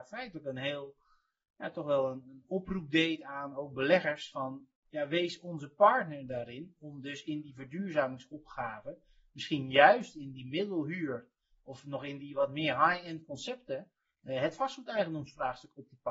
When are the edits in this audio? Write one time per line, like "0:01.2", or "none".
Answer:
none